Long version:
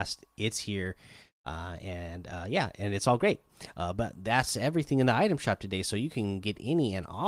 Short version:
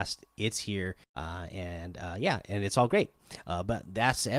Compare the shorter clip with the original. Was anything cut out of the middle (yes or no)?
yes